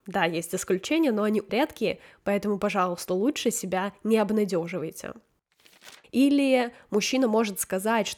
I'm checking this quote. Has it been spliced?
yes; 2 cuts; at 1.5 s, 6.0 s

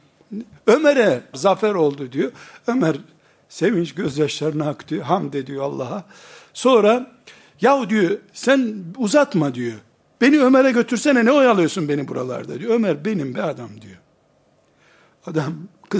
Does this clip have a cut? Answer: yes; 1 cut; at 1.3 s

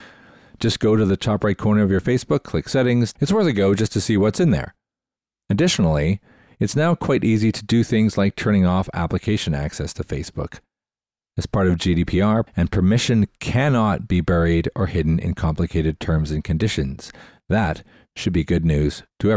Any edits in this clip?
yes; 3 cuts; at 3.2 s, 11.3 s, 12.5 s

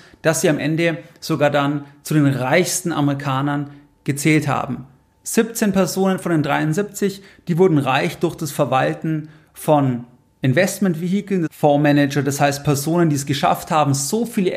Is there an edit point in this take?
yes; 1 cut; at 11.5 s

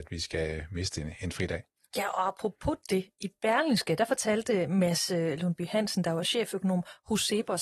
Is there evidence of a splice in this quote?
no; 0 cuts

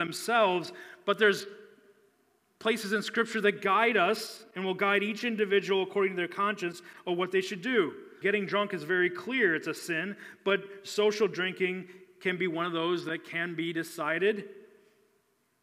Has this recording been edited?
yes; 1 cut; at 8.2 s

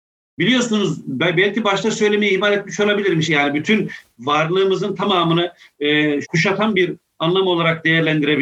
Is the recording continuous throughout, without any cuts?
no; 2 cuts; at 3.2 s, 6.2 s

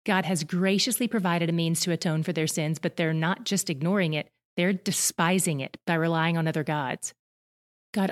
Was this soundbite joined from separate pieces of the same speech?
no; 0 cuts

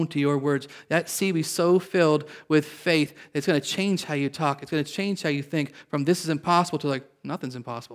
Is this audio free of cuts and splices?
yes; 0 cuts

